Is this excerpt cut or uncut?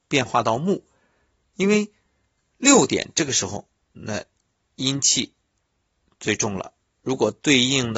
uncut